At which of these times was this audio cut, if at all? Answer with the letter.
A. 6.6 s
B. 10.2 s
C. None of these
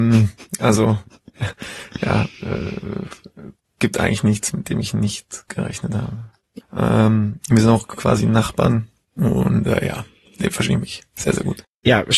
A